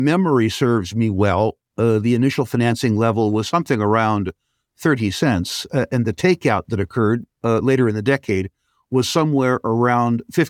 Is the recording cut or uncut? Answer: uncut